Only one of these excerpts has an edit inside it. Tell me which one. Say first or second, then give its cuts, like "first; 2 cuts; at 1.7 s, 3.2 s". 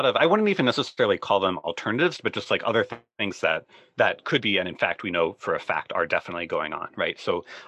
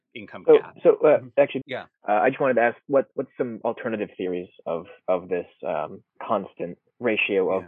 second; 2 cuts; at 1.6 s, 6.1 s